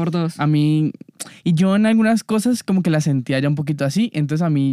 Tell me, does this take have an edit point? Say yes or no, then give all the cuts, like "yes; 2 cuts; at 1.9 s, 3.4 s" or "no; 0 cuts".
no; 0 cuts